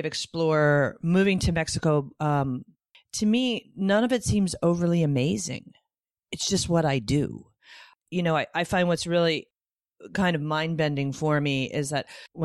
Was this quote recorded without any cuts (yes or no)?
yes